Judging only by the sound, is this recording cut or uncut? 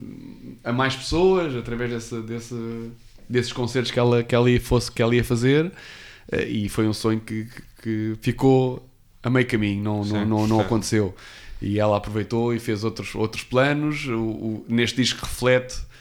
uncut